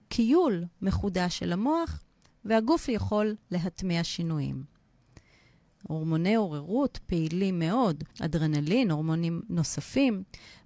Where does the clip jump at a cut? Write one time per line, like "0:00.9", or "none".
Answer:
0:05.8
0:08.1